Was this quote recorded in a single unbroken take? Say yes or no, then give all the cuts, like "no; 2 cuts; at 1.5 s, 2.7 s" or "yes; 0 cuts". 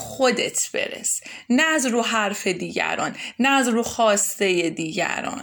yes; 0 cuts